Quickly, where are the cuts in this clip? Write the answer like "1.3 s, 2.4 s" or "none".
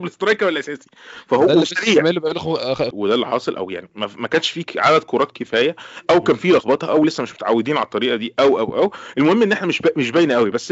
2.9 s